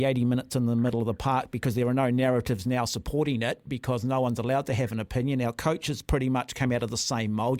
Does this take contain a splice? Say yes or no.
no